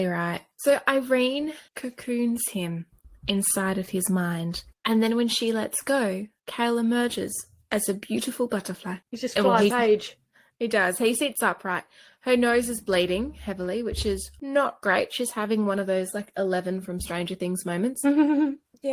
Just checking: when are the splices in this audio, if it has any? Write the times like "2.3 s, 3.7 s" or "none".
9.7 s